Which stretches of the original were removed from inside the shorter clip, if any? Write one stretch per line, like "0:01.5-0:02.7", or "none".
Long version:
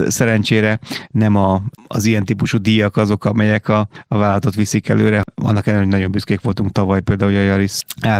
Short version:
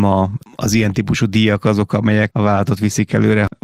0:03.6-0:04.1

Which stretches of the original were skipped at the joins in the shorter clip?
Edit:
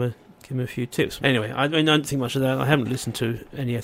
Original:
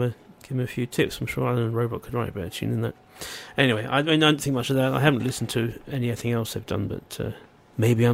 0:01.2-0:03.5

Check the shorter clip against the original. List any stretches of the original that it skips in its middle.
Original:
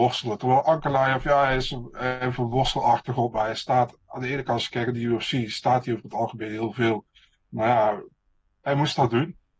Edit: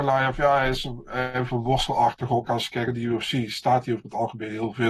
0:03.3-0:04.4

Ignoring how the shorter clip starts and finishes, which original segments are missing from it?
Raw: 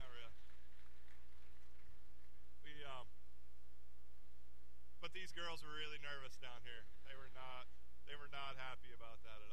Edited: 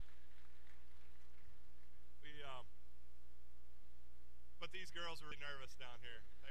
0:05.7-0:05.9

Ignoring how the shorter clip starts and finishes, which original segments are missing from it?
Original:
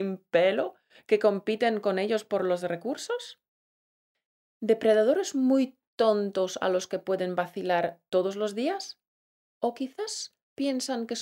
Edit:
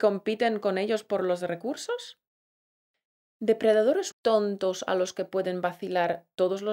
0:05.3-0:05.9

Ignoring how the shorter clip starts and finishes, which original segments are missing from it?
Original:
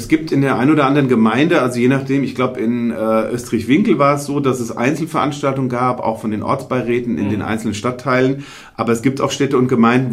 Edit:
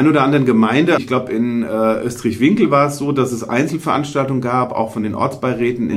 0:01.6-0:02.3

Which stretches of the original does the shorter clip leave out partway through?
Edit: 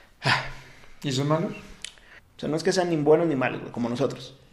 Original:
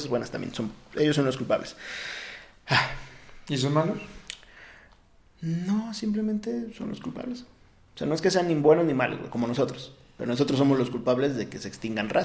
0:04.6-0:07.8

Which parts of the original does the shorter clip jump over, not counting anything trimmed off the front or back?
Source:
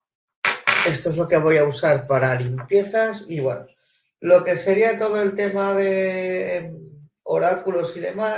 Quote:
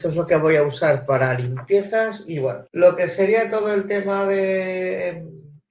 0:03.7-0:04.2

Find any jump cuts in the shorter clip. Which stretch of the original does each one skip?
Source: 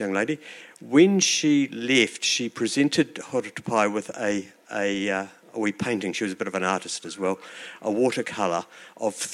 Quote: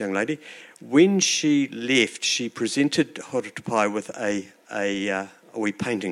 none

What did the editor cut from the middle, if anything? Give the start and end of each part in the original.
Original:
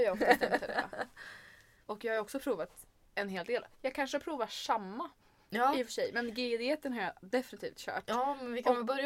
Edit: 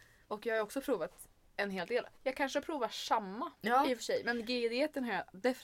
0:05.1-0:05.5

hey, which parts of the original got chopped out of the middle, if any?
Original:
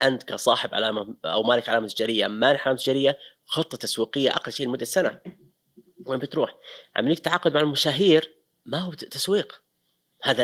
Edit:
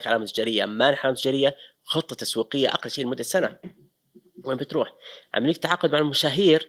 none

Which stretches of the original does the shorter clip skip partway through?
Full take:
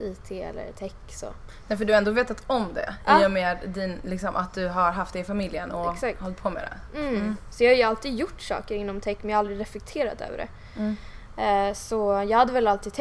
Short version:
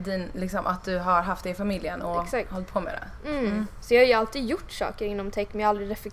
none

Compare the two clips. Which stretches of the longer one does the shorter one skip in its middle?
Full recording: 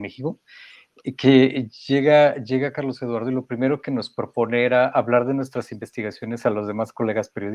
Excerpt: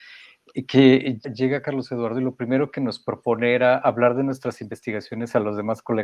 0:01.7-0:02.3

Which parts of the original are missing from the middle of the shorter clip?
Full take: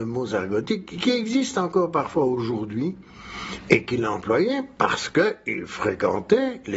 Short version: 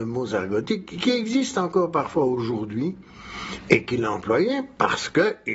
none

